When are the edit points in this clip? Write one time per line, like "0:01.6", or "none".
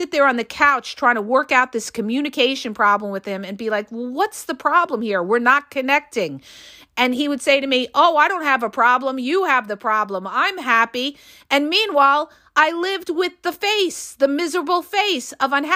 none